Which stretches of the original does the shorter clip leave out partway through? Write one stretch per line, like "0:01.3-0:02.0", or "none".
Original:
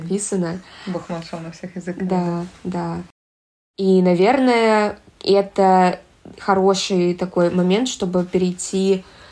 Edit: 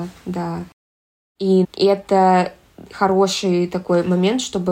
0:04.0-0:05.1